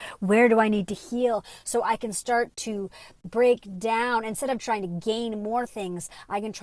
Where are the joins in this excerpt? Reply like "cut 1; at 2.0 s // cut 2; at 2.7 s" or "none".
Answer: none

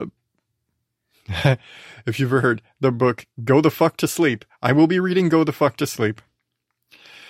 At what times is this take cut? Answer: none

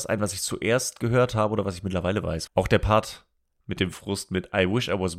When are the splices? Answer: cut 1; at 2.5 s

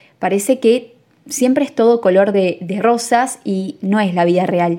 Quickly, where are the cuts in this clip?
none

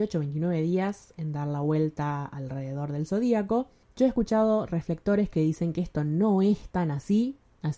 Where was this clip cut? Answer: cut 1; at 3.8 s

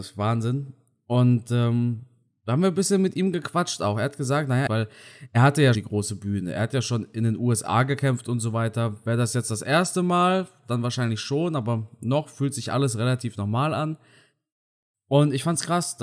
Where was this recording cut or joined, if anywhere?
cut 1; at 4.7 s // cut 2; at 5.7 s

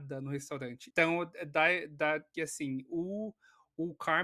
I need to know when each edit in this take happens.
cut 1; at 0.9 s // cut 2; at 2.3 s

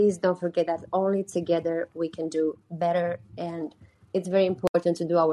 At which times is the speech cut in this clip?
none

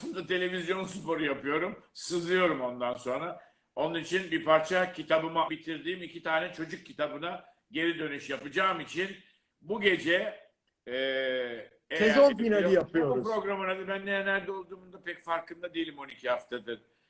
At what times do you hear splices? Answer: cut 1; at 5.5 s

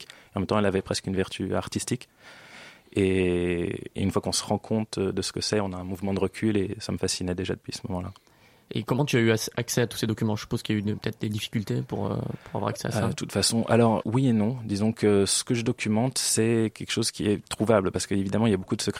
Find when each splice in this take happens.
cut 1; at 14.0 s

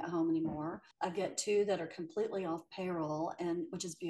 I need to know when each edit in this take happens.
cut 1; at 0.9 s

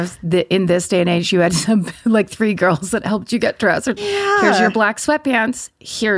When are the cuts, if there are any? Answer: cut 1; at 4.0 s

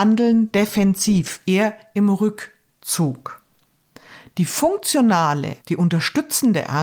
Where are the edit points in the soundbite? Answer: cut 1; at 5.6 s

